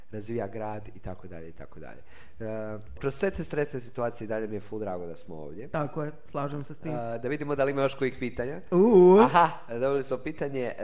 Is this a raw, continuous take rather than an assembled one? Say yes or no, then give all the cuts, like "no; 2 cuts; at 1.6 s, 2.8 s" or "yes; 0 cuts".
no; 1 cut; at 3.0 s